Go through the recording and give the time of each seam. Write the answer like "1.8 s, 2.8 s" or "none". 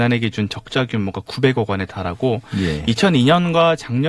none